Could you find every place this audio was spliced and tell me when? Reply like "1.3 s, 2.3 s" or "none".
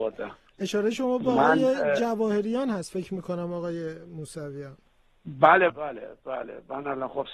5.7 s

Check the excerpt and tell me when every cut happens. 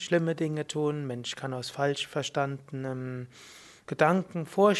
3.8 s

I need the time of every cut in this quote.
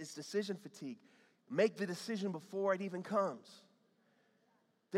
none

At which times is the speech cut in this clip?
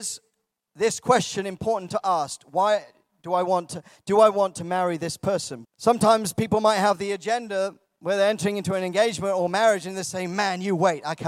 5.6 s

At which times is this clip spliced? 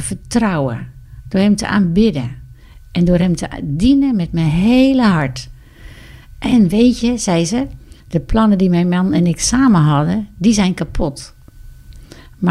8.0 s

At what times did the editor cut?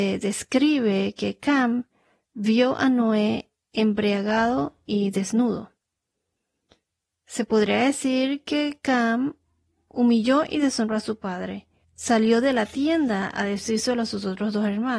11.8 s

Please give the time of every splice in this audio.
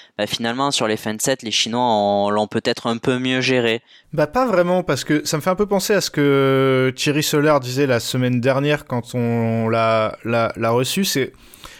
4.0 s

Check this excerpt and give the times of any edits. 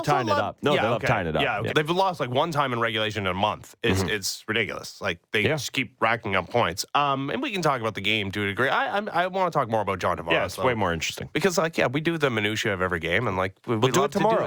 1.7 s

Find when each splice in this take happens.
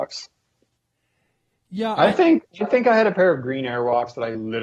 none

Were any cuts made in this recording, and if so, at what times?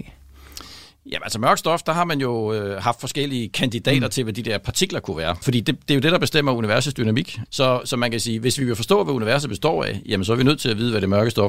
5.4 s, 7.5 s

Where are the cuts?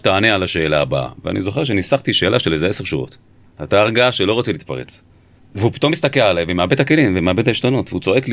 3.5 s, 5.4 s

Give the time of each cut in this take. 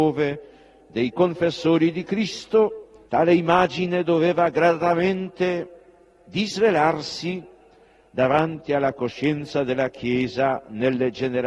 3.1 s

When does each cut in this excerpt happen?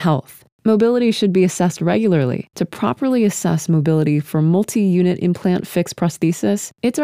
2.5 s

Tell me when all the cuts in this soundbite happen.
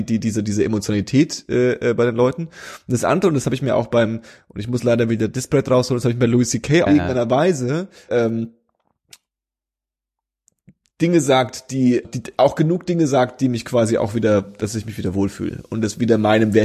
6.9 s, 8.1 s, 12.0 s

